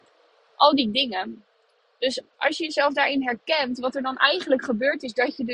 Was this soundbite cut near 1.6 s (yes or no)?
no